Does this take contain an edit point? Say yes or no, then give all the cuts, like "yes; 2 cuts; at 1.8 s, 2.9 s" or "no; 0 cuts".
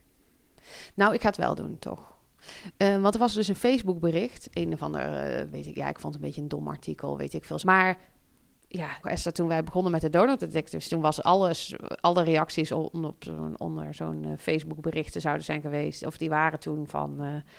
yes; 2 cuts; at 7.6 s, 9.0 s